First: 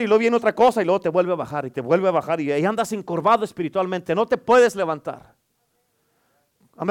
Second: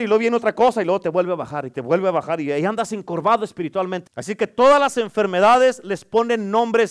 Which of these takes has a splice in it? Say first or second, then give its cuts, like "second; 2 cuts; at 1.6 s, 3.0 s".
second; 1 cut; at 4.1 s